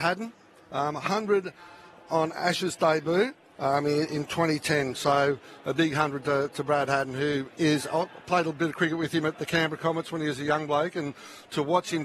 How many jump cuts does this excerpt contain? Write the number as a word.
zero